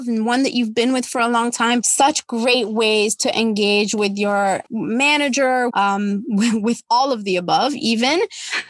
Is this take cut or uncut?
cut